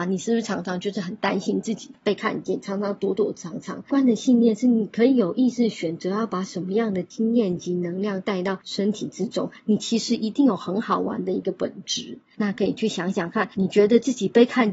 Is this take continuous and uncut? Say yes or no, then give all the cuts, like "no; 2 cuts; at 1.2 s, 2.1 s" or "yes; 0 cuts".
no; 1 cut; at 3.9 s